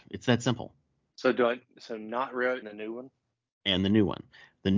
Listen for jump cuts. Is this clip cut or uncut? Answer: cut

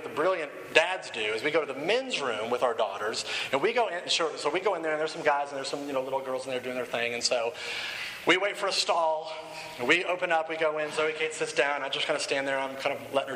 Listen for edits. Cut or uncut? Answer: uncut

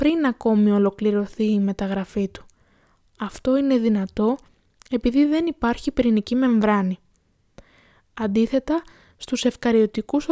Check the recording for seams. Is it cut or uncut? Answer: uncut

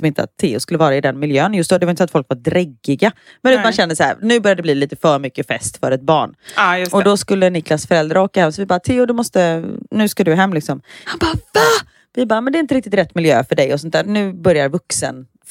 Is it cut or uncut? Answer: uncut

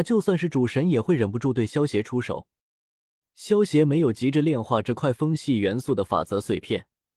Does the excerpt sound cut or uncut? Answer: uncut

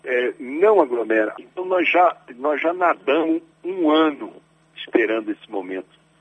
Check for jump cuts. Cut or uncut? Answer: cut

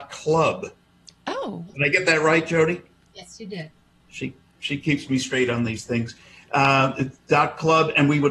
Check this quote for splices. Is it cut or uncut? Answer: uncut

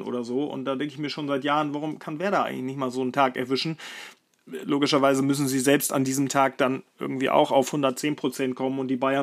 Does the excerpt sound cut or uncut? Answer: uncut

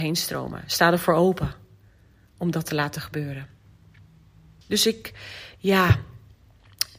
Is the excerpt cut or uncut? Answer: cut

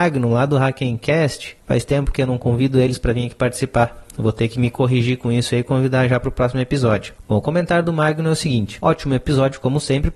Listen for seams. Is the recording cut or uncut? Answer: uncut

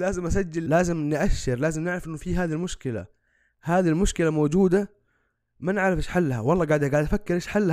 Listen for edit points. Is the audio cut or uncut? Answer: uncut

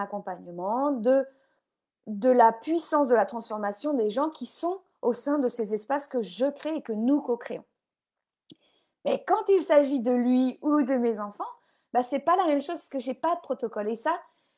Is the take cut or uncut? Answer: uncut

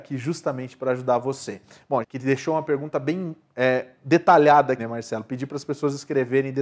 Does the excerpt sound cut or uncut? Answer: cut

